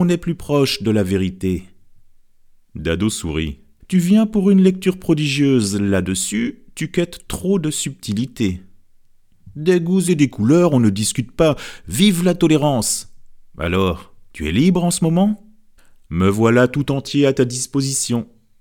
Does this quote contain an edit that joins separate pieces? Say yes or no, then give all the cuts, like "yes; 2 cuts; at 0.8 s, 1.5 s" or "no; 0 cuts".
yes; 1 cut; at 3.8 s